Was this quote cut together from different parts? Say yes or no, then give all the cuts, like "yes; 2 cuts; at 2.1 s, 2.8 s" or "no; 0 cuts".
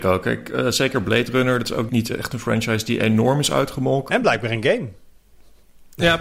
yes; 2 cuts; at 1.9 s, 4.1 s